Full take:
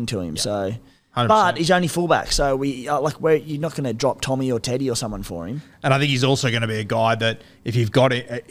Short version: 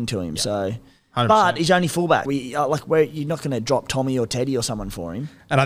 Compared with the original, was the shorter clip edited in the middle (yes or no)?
yes